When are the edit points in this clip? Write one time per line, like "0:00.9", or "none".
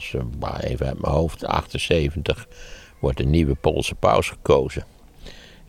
none